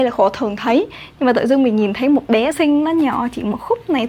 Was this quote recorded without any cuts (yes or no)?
no